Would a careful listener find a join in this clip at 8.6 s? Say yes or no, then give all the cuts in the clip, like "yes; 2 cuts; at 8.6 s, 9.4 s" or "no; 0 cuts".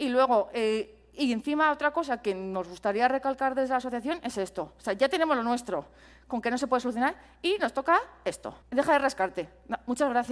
yes; 1 cut; at 8.6 s